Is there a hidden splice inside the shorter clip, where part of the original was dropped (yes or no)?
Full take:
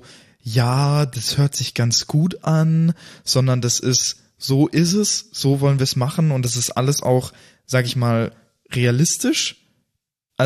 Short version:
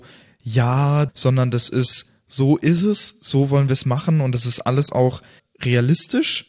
yes